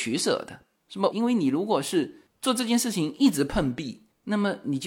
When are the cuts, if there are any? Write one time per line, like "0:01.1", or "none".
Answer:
0:01.1